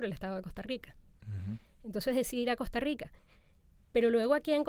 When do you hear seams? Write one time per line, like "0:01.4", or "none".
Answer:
0:01.2